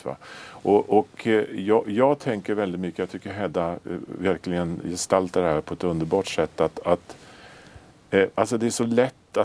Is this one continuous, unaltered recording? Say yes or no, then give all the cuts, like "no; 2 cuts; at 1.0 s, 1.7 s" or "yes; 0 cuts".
yes; 0 cuts